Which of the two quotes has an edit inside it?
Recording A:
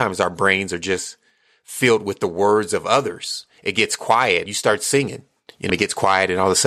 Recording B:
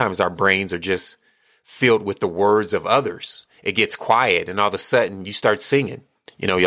A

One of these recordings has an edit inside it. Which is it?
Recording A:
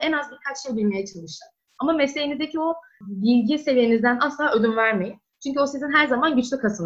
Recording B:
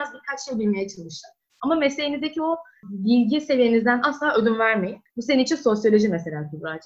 B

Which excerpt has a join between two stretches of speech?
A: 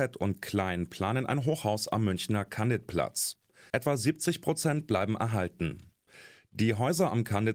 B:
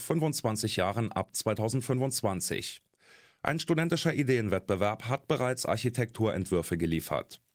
A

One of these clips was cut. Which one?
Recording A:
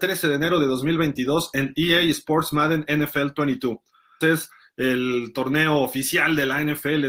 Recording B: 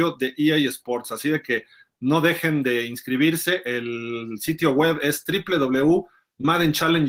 A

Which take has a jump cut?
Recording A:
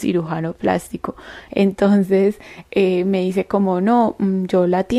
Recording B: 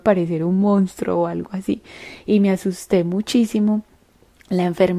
A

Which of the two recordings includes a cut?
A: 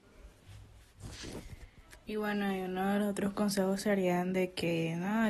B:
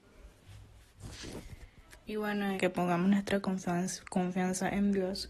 B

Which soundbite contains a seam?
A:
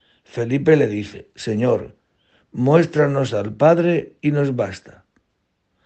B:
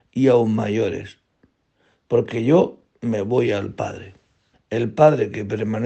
B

